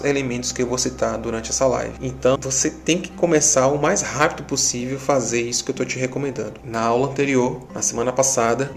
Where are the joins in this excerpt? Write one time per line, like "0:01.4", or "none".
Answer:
0:02.4
0:06.6

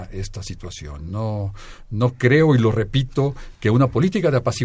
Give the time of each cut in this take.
none

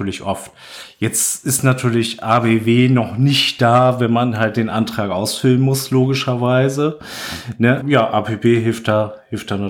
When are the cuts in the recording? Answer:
0:07.8

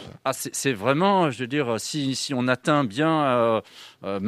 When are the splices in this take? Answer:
none

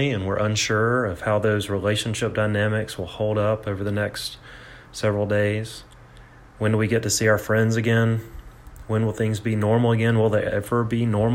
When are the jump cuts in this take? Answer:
none

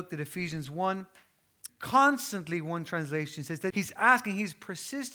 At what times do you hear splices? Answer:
0:01.7
0:03.7

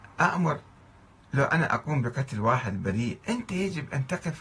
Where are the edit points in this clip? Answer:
0:03.2

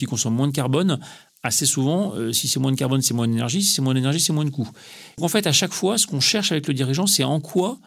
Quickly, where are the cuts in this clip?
0:05.2

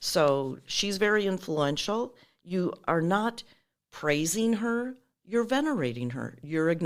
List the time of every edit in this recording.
none

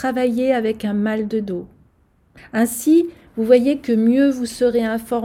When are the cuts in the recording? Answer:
0:02.4

